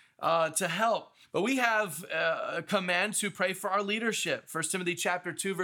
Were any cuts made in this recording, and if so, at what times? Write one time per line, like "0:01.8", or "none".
0:01.2